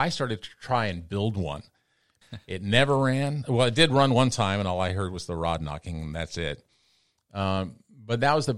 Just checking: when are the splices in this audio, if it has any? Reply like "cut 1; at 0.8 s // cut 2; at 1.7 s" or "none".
cut 1; at 2.2 s